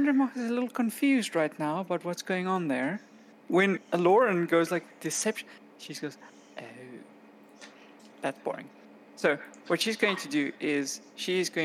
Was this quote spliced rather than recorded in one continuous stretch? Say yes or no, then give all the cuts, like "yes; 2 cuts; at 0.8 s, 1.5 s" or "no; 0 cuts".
no; 0 cuts